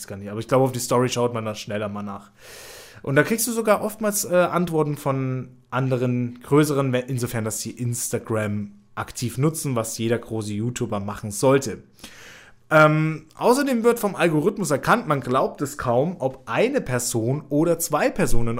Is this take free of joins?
yes; 0 cuts

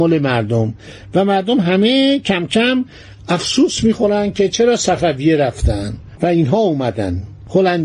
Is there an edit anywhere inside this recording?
no; 0 cuts

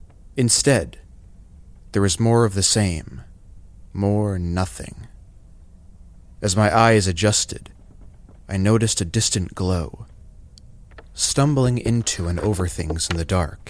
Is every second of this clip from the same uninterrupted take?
yes; 0 cuts

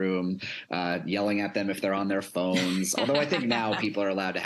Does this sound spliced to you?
no; 0 cuts

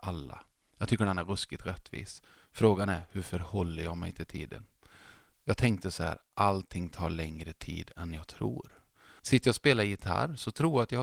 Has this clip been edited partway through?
yes; 2 cuts; at 5.3 s, 9.2 s

